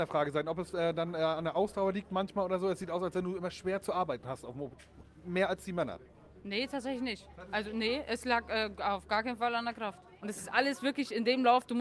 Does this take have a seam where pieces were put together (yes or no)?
yes